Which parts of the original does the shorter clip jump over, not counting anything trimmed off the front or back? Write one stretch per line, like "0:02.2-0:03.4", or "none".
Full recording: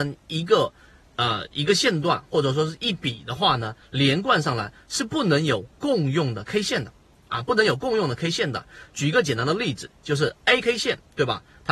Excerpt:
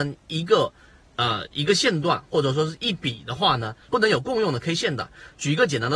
0:03.9-0:07.4